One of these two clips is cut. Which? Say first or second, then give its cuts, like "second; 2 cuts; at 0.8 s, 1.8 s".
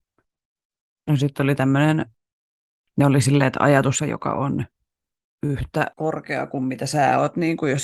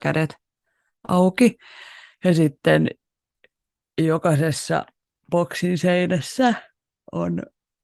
first; 2 cuts; at 4.0 s, 5.9 s